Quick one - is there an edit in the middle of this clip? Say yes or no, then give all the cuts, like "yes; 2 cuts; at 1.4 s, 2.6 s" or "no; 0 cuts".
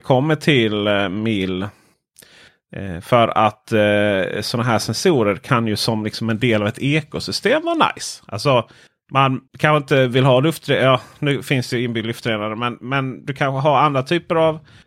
yes; 1 cut; at 9.5 s